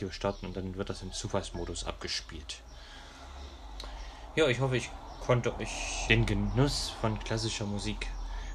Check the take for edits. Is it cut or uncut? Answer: cut